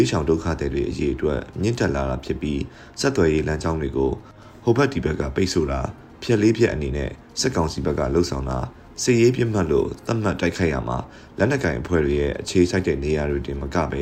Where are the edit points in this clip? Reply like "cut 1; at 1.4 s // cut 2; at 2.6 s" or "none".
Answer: none

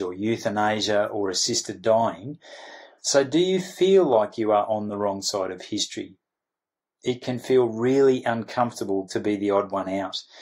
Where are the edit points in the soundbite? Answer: cut 1; at 3.0 s

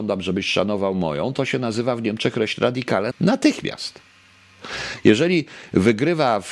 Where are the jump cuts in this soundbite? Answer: cut 1; at 3.1 s

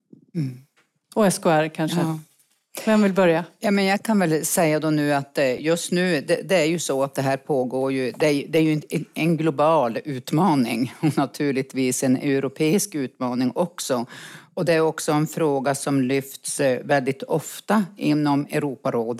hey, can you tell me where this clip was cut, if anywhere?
none

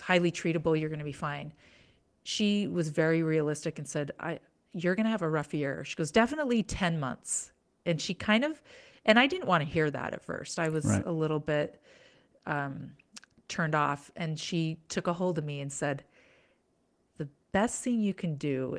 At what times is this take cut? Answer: none

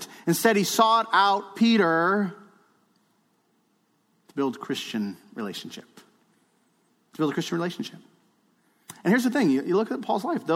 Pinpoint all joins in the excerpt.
none

